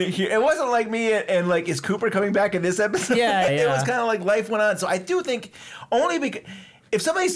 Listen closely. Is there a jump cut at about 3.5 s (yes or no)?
yes